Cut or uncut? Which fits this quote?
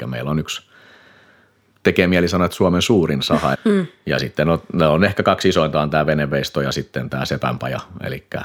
cut